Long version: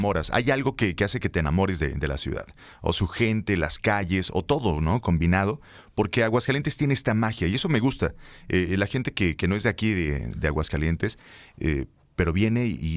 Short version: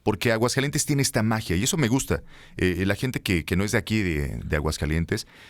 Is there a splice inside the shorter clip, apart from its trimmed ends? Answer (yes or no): no